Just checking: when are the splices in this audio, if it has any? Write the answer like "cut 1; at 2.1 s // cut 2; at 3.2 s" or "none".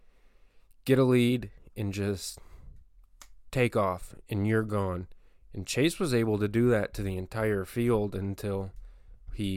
none